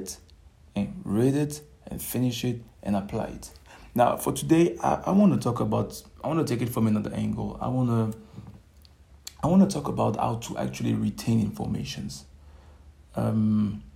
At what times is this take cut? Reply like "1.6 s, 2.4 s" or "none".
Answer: none